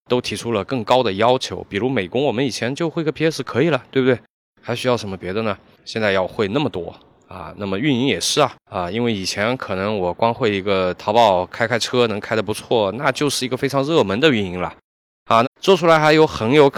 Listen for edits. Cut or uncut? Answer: cut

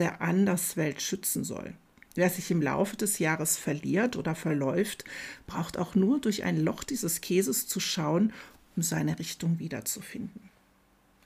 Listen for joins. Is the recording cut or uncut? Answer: uncut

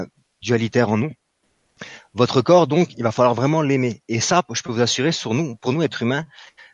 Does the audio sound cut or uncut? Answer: uncut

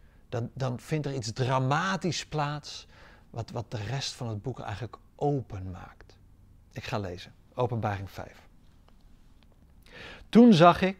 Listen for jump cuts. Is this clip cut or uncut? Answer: uncut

